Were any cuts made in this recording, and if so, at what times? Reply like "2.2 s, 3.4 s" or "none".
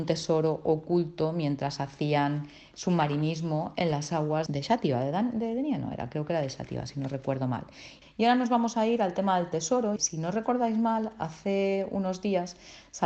4.5 s, 8.0 s, 10.0 s